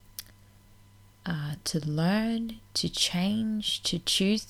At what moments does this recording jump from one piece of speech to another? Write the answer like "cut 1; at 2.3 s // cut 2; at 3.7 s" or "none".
cut 1; at 1.1 s